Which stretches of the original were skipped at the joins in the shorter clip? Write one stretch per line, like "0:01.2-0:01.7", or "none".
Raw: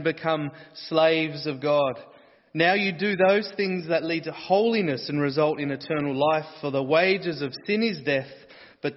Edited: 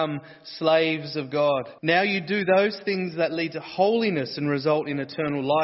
0:02.1-0:02.5